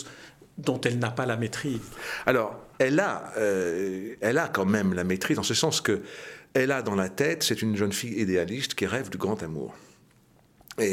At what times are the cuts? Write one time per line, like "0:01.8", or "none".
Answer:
0:02.7